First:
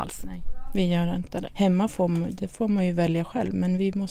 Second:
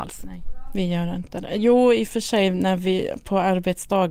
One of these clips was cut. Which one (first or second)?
first